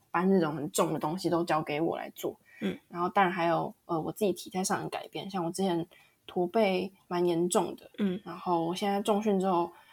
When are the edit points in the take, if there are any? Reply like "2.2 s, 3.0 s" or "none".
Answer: none